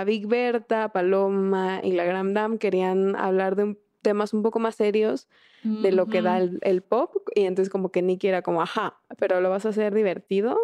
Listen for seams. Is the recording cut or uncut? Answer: uncut